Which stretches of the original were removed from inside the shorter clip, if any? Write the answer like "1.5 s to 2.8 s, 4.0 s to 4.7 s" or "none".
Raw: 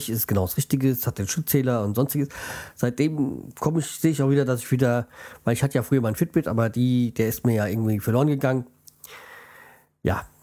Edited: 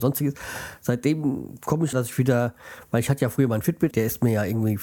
3.9 s to 4.5 s, 6.4 s to 7.1 s